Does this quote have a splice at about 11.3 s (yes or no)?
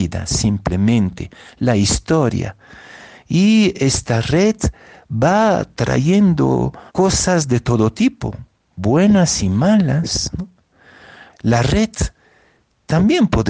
yes